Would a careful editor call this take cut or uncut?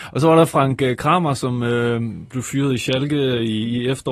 uncut